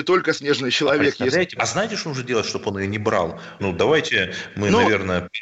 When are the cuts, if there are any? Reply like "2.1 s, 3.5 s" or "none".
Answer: 1.6 s, 3.6 s